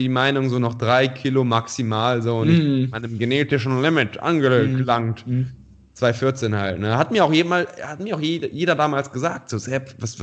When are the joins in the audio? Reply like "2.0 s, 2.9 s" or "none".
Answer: none